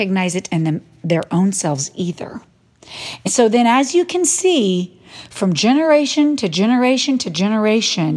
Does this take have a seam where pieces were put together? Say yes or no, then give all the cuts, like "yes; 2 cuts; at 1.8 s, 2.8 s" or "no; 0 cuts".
no; 0 cuts